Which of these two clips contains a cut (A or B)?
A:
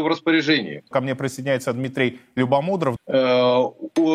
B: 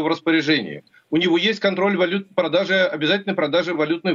A